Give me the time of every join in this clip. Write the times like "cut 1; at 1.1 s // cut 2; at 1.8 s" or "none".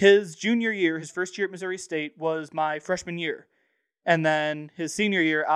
none